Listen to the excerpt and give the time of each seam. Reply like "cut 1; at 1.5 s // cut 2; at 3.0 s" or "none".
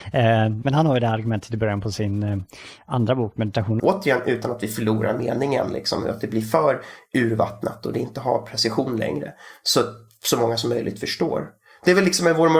cut 1; at 3.8 s